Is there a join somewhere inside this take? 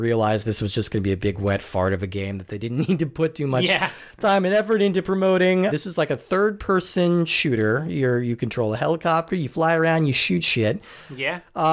yes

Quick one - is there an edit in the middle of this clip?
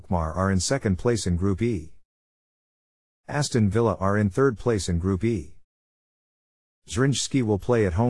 no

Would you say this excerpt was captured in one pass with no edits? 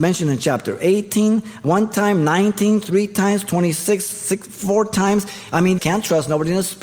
no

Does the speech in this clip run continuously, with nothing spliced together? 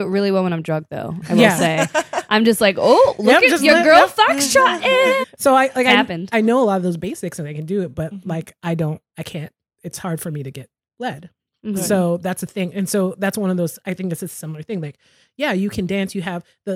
no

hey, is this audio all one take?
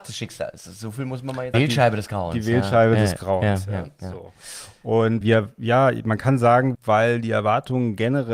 no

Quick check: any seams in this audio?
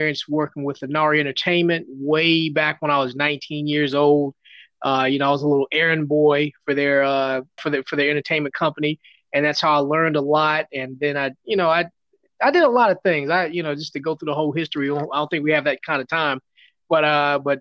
yes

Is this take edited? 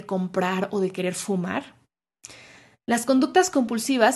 no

